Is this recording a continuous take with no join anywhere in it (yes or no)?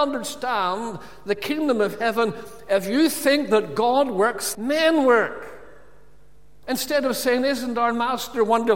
no